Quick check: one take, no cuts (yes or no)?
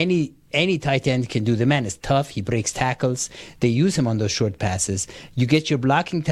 yes